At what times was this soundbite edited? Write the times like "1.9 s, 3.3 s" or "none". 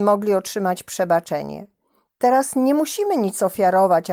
none